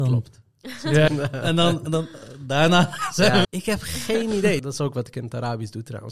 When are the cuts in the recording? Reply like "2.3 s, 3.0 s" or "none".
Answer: 1.1 s, 3.4 s, 4.6 s